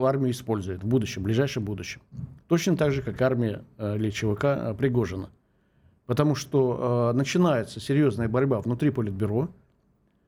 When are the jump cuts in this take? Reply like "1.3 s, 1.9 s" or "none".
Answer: none